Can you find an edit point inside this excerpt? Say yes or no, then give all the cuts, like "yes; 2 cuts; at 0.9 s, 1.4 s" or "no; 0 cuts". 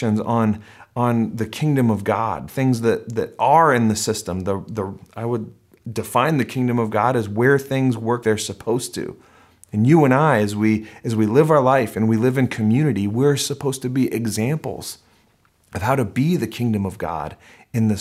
yes; 1 cut; at 8.2 s